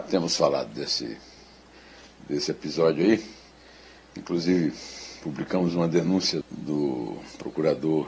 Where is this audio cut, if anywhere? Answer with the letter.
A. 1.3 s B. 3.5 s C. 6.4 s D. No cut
C